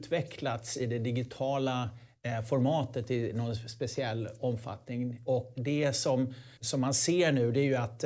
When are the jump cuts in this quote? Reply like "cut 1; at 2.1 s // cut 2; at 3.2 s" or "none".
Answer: cut 1; at 6.6 s